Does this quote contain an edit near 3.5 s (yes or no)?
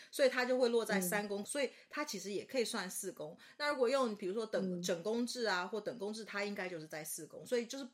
no